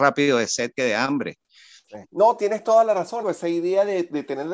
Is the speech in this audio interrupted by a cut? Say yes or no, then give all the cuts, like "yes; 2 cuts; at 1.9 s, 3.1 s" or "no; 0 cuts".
yes; 2 cuts; at 2.0 s, 3.2 s